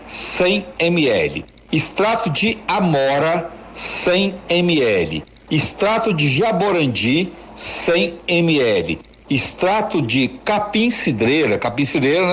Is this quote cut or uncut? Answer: uncut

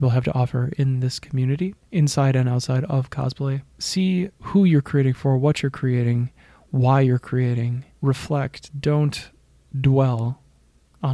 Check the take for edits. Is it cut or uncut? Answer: uncut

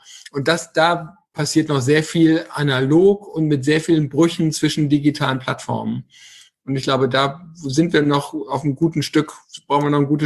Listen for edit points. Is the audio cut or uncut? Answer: uncut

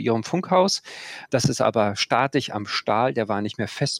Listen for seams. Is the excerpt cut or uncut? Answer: cut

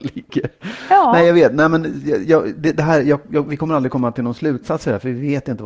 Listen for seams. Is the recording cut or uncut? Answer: uncut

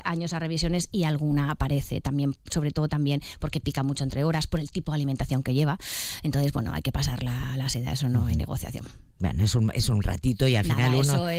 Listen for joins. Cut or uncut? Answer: uncut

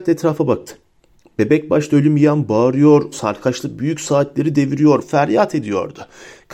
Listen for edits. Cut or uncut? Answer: cut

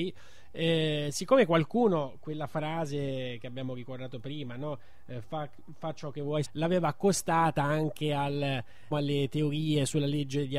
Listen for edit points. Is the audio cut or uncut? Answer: cut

